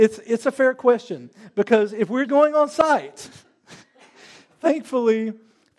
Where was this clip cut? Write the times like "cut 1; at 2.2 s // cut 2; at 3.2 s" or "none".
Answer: cut 1; at 2.3 s